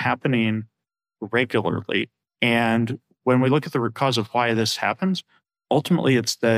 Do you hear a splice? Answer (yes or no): no